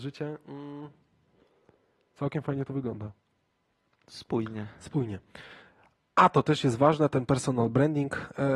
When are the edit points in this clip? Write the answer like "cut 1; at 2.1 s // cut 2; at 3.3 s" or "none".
none